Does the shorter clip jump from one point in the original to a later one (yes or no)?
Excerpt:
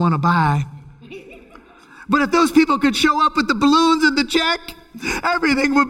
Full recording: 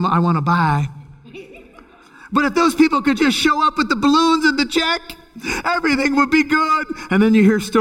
yes